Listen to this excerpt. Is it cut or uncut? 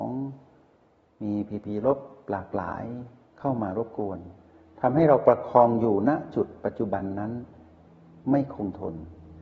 uncut